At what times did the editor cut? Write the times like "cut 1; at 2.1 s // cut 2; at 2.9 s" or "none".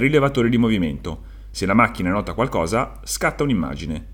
none